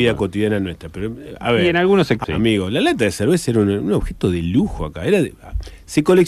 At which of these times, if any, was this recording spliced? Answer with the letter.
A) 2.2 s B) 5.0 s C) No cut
A